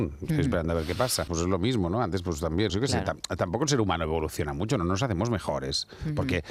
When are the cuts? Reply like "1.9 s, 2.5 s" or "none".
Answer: 1.3 s, 2.7 s